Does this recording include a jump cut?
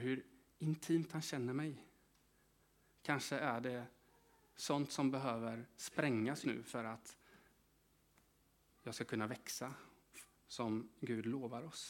yes; 3 cuts; at 2.9 s, 6.4 s, 10.3 s

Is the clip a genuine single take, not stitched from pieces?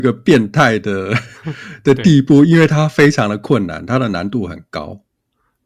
yes; 0 cuts

